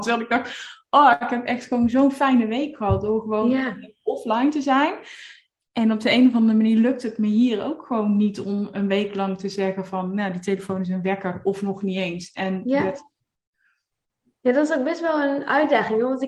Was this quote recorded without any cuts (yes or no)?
yes